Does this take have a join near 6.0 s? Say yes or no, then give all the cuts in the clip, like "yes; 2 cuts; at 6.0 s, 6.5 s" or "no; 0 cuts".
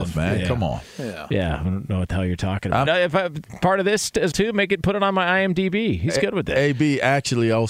no; 2 cuts; at 2.9 s, 4.3 s